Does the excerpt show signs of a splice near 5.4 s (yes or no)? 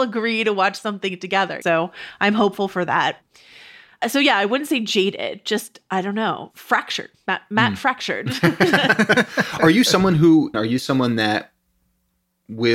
no